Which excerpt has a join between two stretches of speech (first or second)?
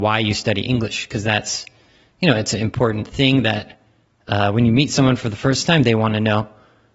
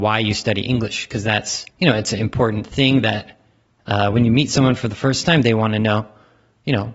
second